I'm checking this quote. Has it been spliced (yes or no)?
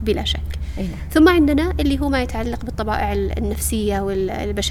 no